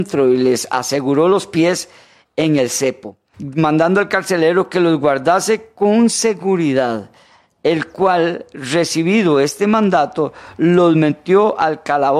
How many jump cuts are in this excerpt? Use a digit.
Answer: 1